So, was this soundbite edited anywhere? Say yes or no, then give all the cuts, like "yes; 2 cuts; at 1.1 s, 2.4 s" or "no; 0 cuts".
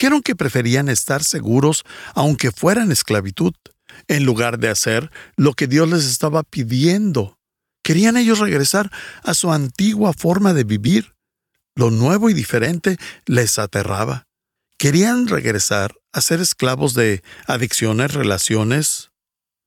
yes; 1 cut; at 14.6 s